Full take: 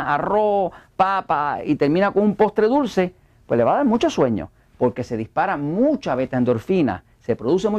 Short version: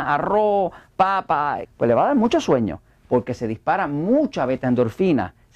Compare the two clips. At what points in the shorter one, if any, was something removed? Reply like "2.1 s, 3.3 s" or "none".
1.6 s